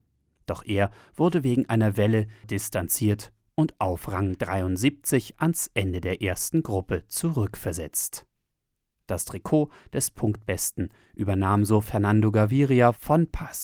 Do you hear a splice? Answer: yes; 1 cut; at 2.4 s

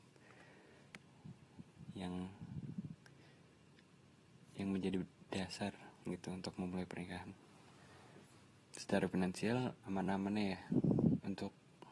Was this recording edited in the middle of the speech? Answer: yes; 1 cut; at 9.8 s

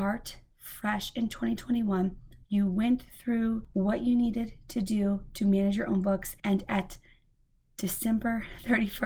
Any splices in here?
yes; 1 cut; at 2.4 s

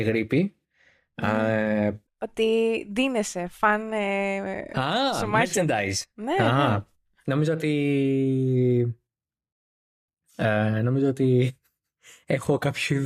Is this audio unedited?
no; 1 cut; at 2.0 s

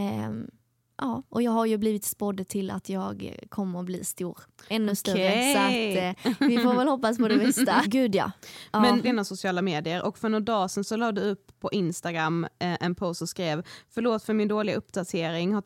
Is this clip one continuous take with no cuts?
no; 2 cuts; at 7.8 s, 9.0 s

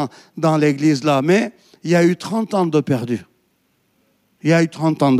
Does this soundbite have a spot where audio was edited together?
no; 0 cuts

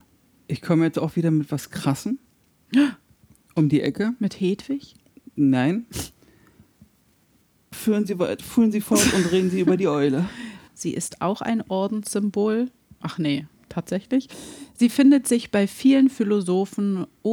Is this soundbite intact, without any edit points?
no; 2 cuts; at 7.7 s, 10.7 s

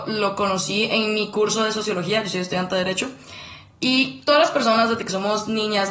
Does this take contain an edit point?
no; 0 cuts

